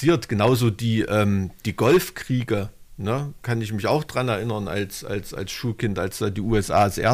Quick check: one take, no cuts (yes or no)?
yes